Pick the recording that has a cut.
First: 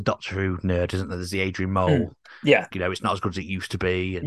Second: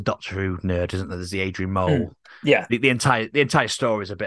first; 1 cut; at 2.7 s

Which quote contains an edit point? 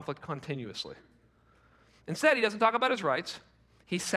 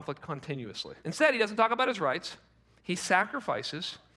second; 1 cut; at 1.0 s

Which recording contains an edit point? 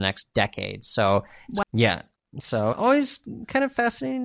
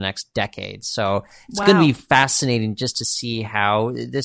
first; 2 cuts; at 1.6 s, 2.7 s

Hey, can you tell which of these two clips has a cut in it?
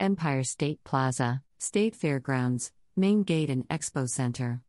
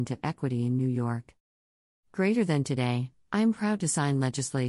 first; 1 cut; at 1.5 s

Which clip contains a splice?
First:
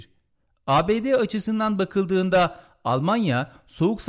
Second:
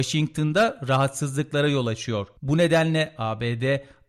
second; 1 cut; at 2.4 s

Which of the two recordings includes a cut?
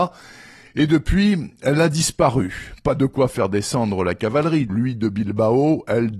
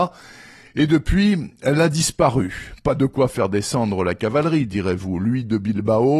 first; 1 cut; at 4.7 s

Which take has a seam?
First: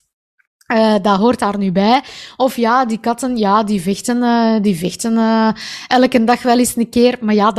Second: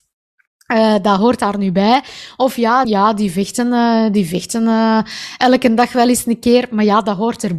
second; 1 cut; at 2.8 s

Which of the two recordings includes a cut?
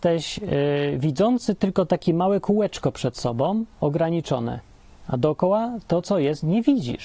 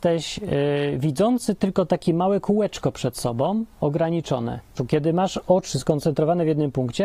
second; 1 cut; at 4.8 s

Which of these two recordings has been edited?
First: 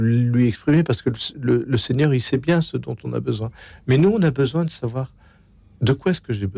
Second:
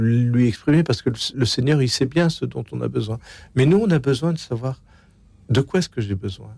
second; 1 cut; at 1.3 s

